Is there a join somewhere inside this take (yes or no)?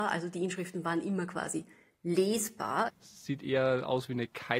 yes